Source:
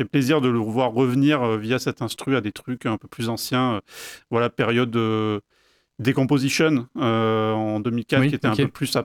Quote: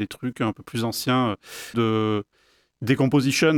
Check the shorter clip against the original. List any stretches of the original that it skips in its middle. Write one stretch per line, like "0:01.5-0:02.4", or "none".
0:04.2-0:04.9